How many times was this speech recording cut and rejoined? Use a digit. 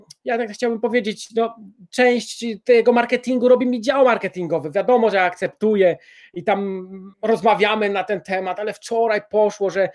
1